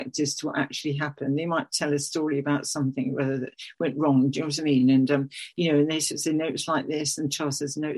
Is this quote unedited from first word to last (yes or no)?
yes